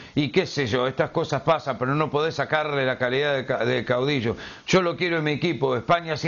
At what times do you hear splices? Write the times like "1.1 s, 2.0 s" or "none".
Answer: none